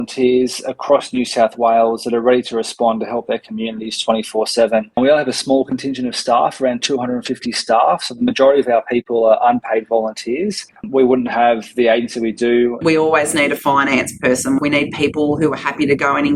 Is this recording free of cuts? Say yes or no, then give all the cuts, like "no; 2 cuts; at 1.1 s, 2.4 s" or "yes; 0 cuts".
no; 2 cuts; at 12.8 s, 14.6 s